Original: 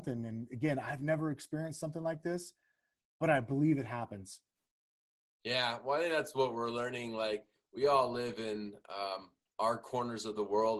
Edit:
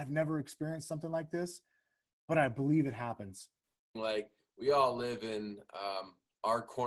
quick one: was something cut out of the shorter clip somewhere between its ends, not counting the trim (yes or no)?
yes